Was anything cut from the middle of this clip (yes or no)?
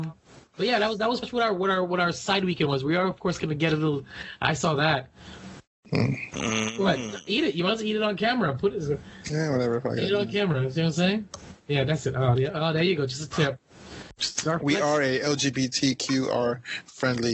yes